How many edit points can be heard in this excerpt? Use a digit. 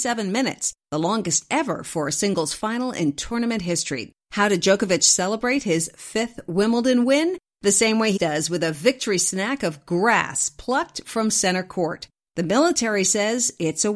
2